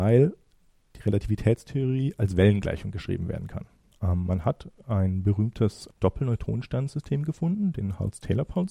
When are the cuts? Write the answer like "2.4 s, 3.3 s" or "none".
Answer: 3.9 s, 5.9 s